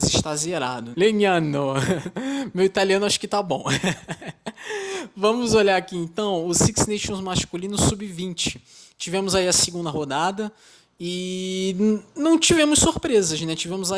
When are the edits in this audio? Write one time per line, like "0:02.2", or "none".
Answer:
0:00.9

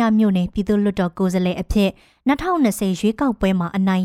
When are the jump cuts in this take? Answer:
none

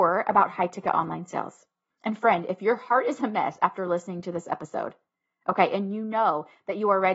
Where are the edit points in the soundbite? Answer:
0:01.9

